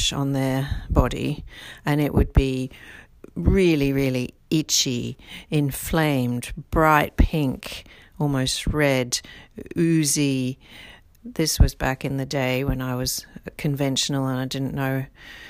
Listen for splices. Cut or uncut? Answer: cut